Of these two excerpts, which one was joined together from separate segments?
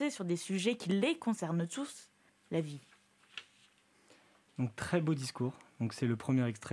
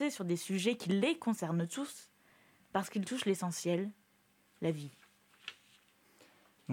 first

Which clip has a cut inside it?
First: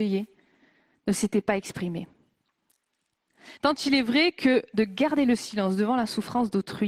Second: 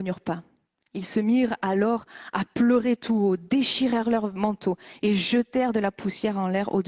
first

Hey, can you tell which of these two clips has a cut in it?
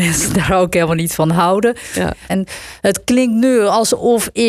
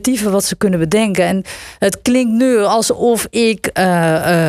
first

